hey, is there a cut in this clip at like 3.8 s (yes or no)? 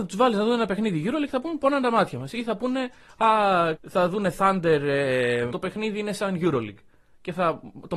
yes